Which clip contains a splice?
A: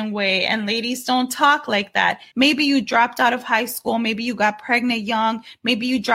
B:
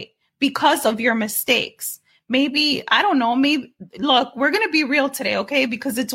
A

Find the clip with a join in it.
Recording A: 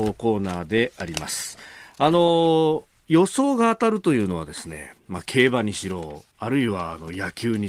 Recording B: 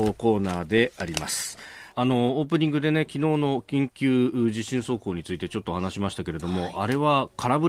B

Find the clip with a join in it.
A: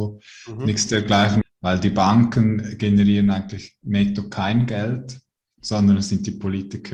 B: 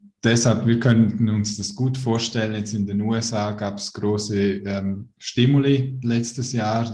A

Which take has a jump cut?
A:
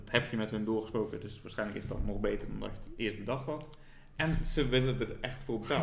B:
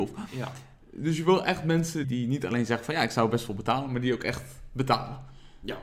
B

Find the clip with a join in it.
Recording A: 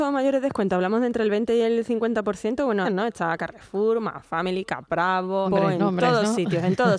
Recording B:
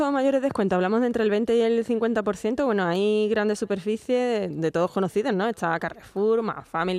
A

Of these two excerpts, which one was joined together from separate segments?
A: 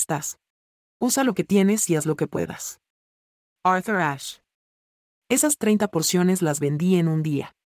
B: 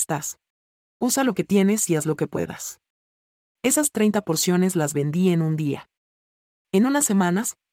B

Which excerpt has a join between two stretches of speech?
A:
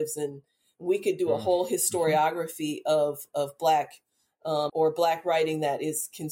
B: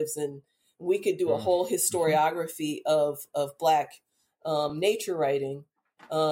A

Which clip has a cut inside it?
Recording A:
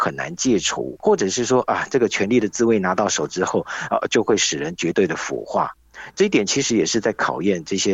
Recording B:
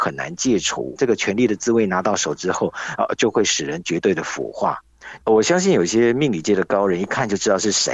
B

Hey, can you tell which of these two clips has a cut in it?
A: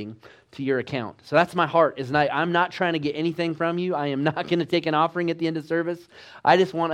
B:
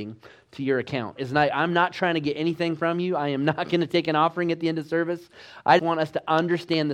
B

